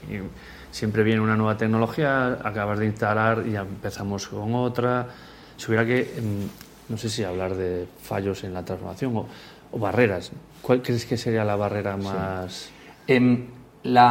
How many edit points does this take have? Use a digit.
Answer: 0